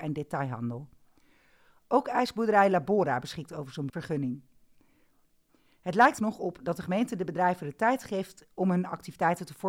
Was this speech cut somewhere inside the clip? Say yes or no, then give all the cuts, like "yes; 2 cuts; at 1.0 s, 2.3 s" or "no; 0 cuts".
yes; 1 cut; at 6.2 s